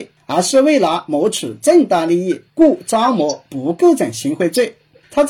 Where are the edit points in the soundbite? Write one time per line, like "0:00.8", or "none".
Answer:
0:02.5